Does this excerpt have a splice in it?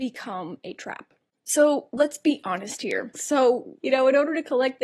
yes; 1 cut; at 3.1 s

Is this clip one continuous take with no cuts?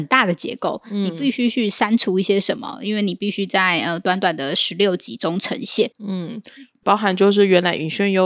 no; 1 cut; at 5.9 s

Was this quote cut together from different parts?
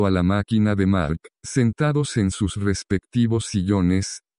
yes; 1 cut; at 1.3 s

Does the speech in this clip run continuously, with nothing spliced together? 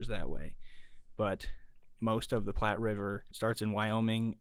yes; 0 cuts

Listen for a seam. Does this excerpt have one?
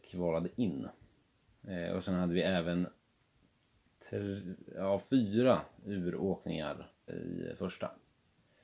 yes; 1 cut; at 7.1 s

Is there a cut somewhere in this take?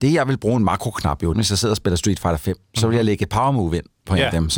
yes; 1 cut; at 1.3 s

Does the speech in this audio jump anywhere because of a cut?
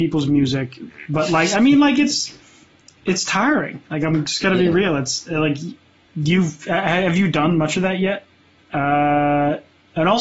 yes; 1 cut; at 8.6 s

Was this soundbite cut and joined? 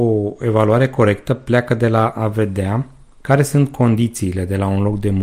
no; 0 cuts

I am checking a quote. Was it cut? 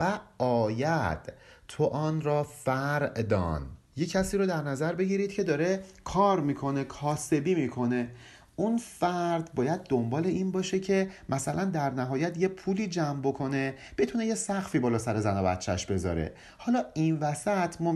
yes; 1 cut; at 3.9 s

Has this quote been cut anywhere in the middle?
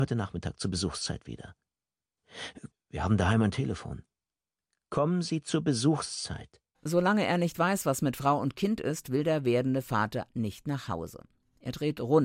yes; 1 cut; at 2.7 s

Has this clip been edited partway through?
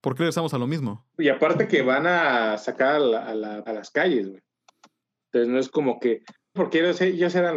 yes; 3 cuts; at 1.1 s, 3.7 s, 6.6 s

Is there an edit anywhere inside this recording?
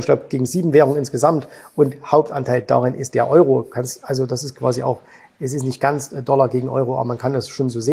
no; 0 cuts

